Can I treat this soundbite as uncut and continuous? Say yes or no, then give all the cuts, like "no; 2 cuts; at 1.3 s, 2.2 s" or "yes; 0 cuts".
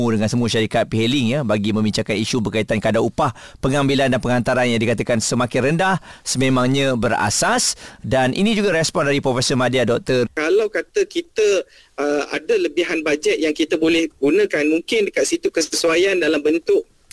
no; 1 cut; at 10.3 s